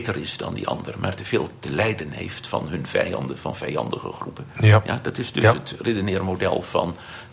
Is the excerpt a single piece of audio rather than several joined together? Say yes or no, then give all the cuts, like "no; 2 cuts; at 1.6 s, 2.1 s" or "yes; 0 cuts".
yes; 0 cuts